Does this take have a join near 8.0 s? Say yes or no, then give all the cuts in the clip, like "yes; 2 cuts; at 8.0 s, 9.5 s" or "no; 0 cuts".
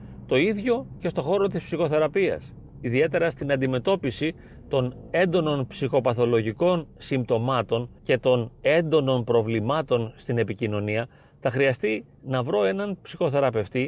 yes; 1 cut; at 8.0 s